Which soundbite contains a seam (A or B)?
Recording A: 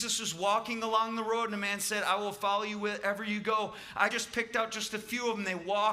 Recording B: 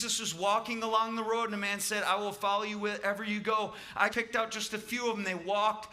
B